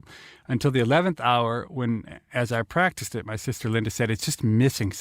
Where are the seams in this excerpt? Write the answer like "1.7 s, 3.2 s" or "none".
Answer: none

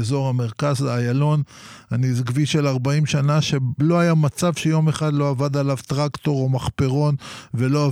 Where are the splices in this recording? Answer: none

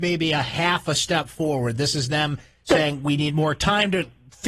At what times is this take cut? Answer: none

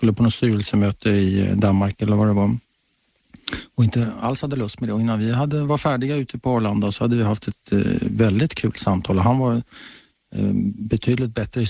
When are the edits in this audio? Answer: none

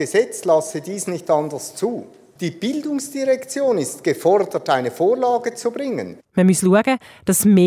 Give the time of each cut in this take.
2.4 s, 6.2 s

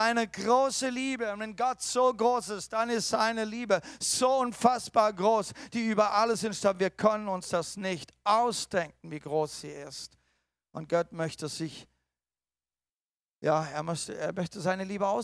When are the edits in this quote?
none

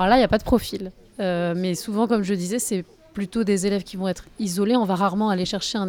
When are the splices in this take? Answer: none

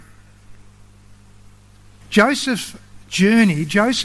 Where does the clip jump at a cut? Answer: 2.0 s

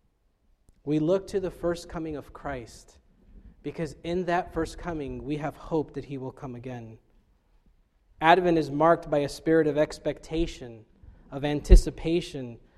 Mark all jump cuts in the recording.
none

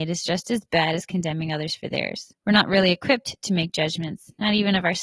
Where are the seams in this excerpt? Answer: 2.4 s

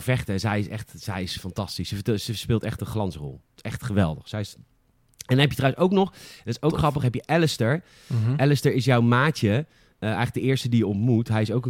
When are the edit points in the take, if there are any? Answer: none

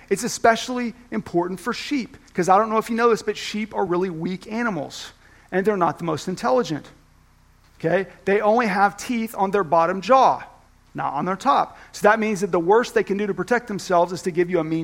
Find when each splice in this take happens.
none

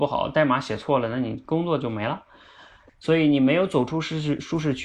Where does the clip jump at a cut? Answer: 2.9 s

